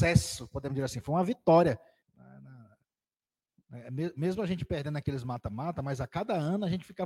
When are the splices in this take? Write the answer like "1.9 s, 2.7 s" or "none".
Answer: 2.0 s